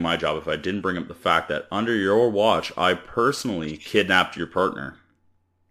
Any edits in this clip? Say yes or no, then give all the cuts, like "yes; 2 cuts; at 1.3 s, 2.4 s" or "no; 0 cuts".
no; 0 cuts